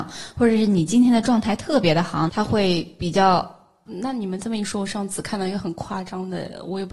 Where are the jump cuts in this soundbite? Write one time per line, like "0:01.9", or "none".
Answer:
0:02.3
0:03.9